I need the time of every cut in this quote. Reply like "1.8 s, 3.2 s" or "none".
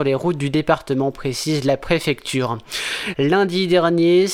3.1 s

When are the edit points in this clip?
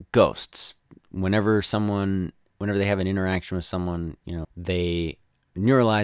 4.4 s

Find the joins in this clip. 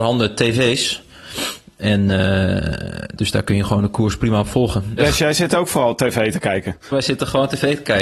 3.2 s, 5.0 s, 6.9 s

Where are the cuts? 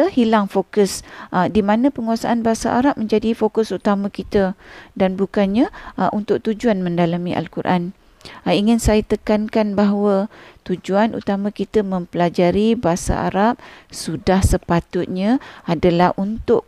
none

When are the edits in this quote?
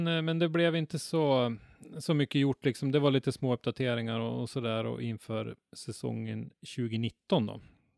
none

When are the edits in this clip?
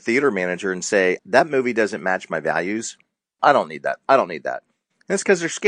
1.2 s, 3.4 s

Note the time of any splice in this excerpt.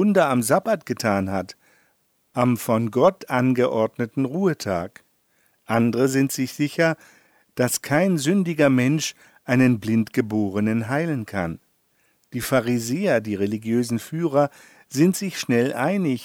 none

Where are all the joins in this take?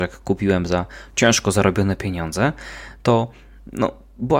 none

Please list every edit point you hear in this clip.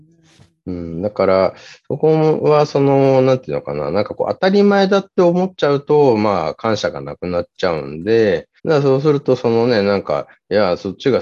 8.6 s

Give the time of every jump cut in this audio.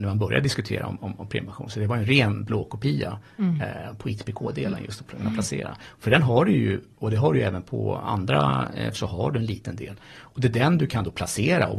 8.9 s

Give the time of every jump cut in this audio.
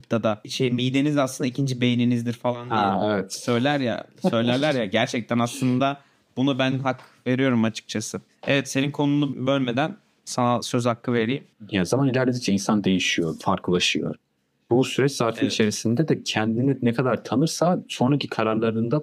13.4 s

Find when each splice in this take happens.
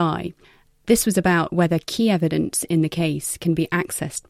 none

